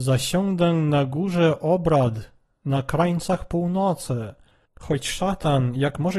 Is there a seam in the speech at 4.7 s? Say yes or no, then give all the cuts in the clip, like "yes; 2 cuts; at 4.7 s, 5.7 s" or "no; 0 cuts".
yes; 1 cut; at 4.7 s